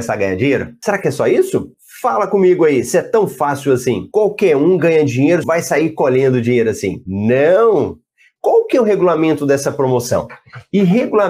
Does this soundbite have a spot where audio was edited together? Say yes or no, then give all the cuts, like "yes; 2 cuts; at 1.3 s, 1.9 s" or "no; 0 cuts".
yes; 2 cuts; at 5.4 s, 8.4 s